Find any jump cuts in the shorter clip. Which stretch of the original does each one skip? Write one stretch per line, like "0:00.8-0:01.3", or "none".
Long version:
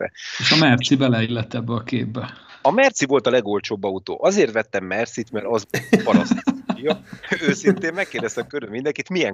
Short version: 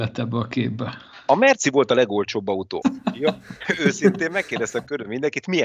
0:04.2-0:06.4